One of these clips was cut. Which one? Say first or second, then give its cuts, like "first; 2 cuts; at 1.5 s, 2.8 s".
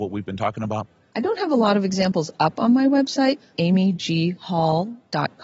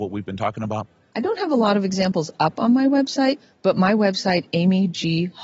first; 1 cut; at 3.5 s